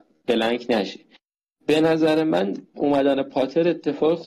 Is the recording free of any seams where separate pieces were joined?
yes; 0 cuts

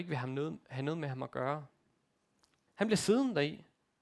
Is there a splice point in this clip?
yes; 1 cut; at 2.7 s

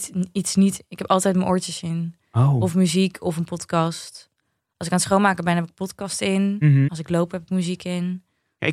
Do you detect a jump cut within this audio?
yes; 1 cut; at 6.9 s

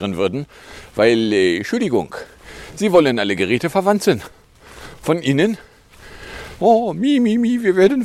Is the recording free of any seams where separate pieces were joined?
no; 1 cut; at 6.6 s

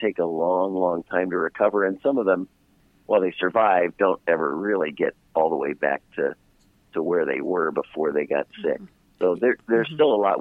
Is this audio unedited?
yes; 0 cuts

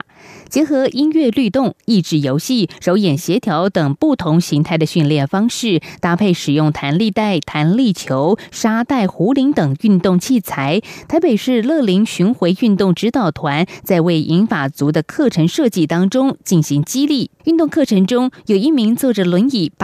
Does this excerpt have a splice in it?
yes; 1 cut; at 17.4 s

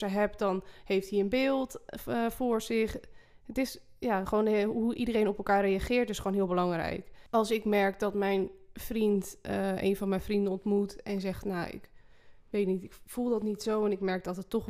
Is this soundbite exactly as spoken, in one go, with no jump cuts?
yes; 0 cuts

